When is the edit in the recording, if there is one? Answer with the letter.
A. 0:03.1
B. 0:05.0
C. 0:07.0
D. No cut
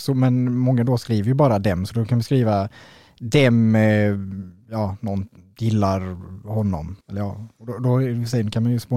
C